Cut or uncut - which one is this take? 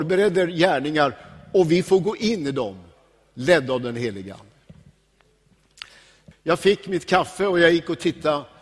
cut